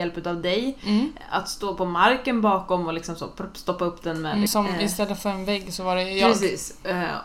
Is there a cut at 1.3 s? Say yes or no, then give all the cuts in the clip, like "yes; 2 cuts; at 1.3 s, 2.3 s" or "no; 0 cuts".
no; 1 cut; at 4.5 s